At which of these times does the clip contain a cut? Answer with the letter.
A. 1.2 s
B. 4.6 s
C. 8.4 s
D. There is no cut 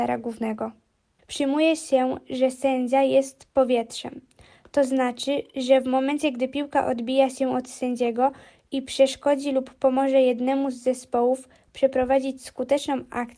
A